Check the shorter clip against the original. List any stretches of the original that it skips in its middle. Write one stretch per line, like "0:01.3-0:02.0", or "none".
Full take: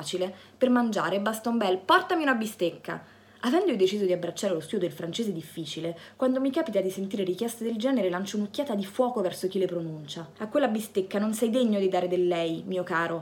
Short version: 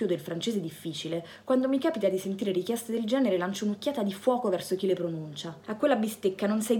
none